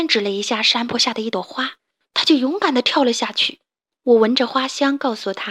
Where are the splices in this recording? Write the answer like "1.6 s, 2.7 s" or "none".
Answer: 3.9 s